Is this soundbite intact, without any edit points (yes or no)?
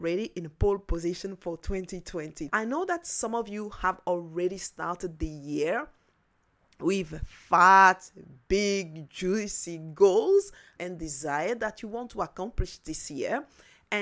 no